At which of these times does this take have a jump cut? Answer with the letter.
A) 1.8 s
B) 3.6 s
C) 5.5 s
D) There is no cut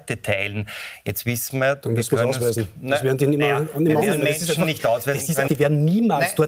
C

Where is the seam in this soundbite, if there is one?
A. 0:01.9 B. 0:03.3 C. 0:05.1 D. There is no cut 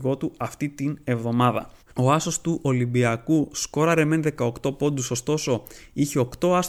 A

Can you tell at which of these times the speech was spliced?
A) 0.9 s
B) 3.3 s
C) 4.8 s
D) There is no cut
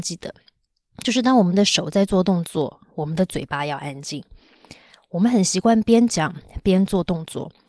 D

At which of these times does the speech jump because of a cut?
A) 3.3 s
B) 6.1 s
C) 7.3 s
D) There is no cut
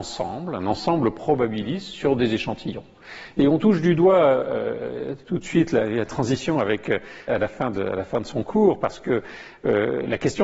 C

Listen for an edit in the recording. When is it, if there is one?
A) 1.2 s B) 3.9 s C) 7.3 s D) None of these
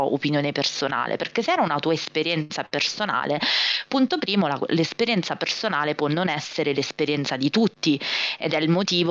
D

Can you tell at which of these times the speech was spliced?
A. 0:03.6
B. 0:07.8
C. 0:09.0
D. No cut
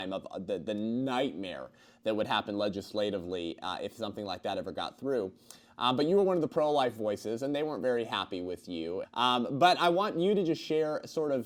C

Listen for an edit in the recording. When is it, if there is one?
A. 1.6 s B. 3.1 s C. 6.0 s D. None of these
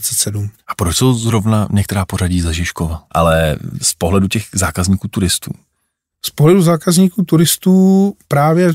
B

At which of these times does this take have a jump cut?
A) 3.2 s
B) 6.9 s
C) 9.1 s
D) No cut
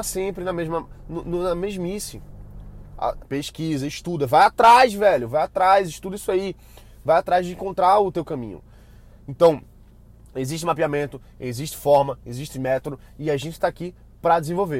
A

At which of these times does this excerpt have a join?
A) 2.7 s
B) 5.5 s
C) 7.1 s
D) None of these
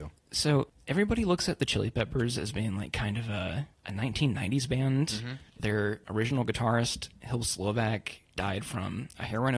B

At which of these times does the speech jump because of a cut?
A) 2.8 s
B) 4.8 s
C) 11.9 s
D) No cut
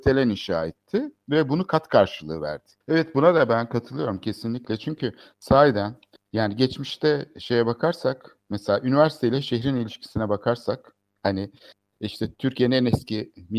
A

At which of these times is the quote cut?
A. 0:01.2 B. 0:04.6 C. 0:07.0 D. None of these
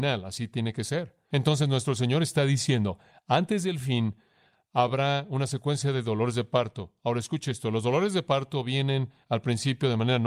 A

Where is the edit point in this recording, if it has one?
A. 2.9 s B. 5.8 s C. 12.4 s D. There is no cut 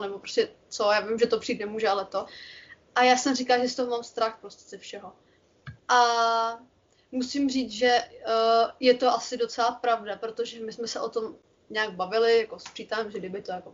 B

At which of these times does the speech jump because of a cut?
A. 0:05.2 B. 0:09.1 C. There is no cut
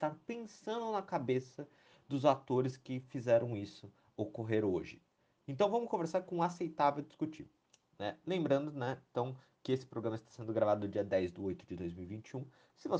C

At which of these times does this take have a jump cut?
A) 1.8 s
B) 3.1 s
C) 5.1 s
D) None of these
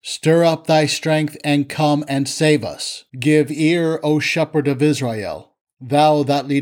B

